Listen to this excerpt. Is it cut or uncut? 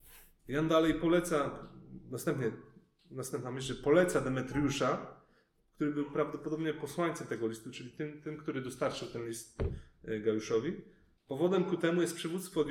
cut